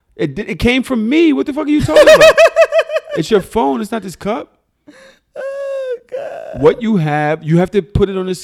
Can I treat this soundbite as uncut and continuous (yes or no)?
yes